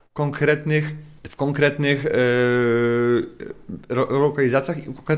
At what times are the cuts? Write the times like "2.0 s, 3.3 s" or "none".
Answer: 1.2 s